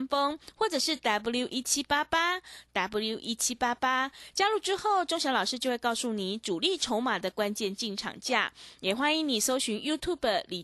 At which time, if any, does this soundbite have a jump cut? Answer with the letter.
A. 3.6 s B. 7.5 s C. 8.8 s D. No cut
D